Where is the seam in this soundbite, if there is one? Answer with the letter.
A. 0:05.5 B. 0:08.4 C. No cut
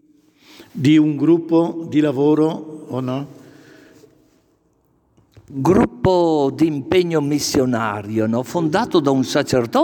C